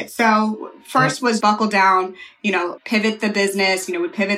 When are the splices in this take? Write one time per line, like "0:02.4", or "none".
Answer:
0:01.4
0:02.8